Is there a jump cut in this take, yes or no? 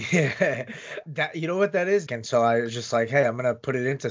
yes